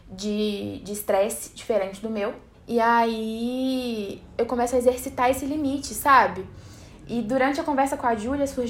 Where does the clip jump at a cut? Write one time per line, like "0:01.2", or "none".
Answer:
0:02.5